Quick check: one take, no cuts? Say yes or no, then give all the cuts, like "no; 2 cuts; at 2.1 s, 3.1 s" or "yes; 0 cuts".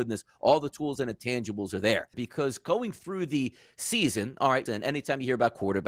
no; 2 cuts; at 2.1 s, 4.7 s